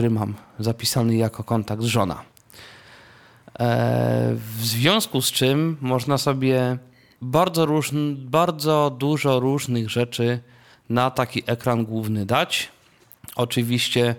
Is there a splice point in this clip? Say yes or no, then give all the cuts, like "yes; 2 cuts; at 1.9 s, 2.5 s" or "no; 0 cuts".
no; 0 cuts